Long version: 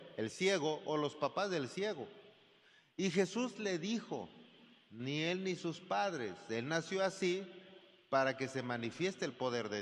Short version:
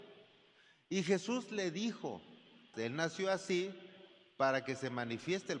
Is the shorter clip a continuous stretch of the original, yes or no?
no